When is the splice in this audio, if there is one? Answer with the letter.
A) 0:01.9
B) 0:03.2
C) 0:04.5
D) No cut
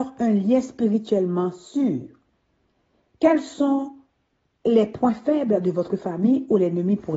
B